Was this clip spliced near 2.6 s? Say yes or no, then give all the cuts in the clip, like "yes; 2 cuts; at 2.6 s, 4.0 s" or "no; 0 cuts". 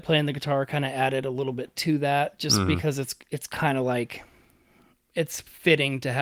no; 0 cuts